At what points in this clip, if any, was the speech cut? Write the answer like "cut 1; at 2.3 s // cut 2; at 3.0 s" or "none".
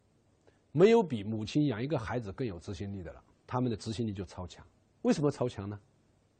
cut 1; at 3.3 s